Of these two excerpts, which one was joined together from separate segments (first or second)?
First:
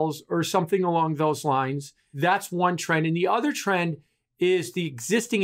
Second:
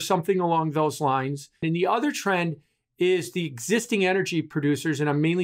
second